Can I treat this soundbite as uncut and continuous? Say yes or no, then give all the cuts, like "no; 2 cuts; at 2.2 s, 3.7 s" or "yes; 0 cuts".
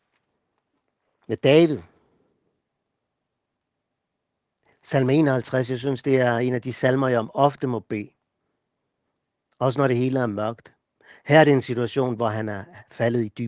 yes; 0 cuts